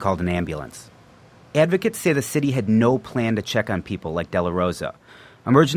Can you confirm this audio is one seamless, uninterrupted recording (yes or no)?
yes